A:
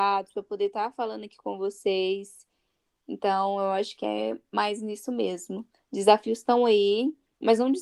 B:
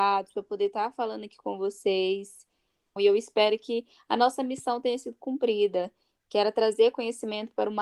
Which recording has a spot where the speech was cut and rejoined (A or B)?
B